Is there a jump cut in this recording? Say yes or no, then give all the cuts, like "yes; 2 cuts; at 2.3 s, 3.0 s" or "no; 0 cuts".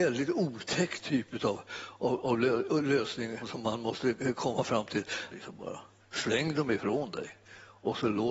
yes; 2 cuts; at 3.4 s, 5.3 s